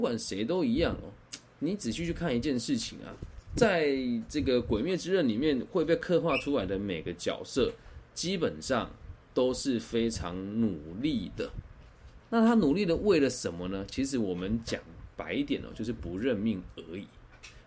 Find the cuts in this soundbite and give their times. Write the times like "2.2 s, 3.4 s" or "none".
none